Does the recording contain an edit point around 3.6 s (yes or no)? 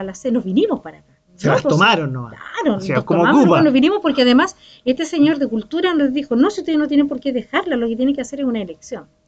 no